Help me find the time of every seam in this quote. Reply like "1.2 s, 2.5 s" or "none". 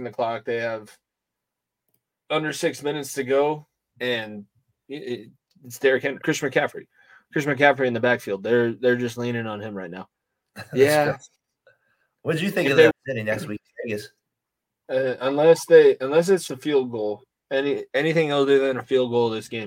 6.2 s, 12.9 s, 16.5 s